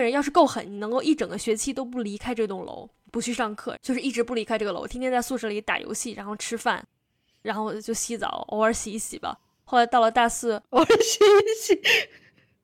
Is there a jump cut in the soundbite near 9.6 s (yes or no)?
no